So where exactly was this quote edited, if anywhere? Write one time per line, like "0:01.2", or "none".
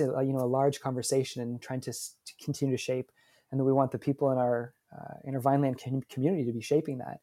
none